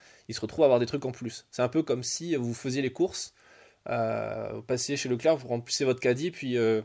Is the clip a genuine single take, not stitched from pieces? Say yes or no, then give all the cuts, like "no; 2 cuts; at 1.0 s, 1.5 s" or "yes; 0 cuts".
yes; 0 cuts